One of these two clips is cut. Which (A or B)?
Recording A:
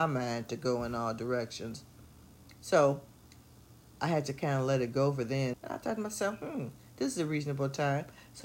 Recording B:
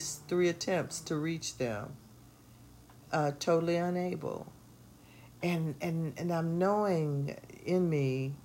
A